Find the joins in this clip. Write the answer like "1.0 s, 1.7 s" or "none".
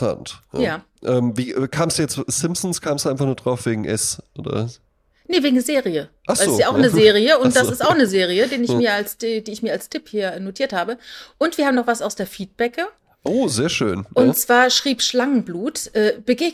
none